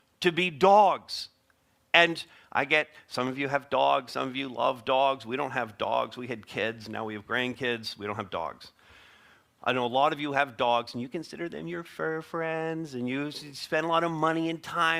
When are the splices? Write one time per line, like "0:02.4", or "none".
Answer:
none